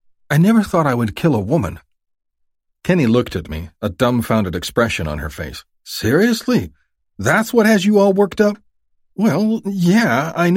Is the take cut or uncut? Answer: uncut